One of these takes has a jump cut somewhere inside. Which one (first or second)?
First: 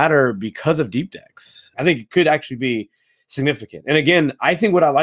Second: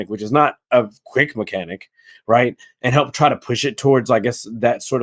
first